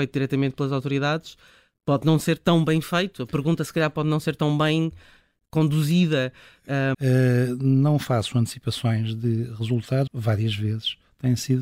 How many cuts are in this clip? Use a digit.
2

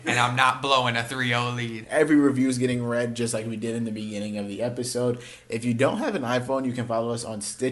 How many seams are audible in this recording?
1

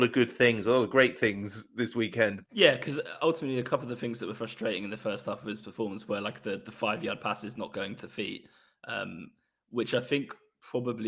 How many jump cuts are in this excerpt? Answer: 1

